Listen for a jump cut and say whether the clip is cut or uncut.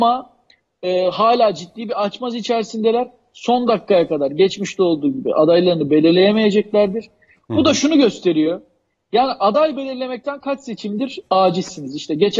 uncut